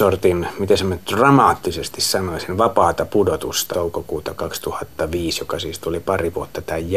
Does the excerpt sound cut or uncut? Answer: cut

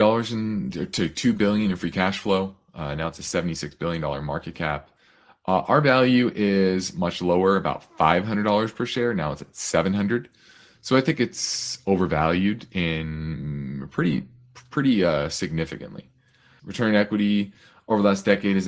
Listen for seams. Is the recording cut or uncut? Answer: cut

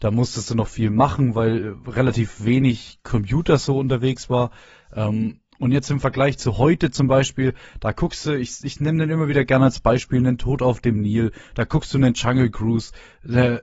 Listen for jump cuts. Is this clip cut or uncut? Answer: uncut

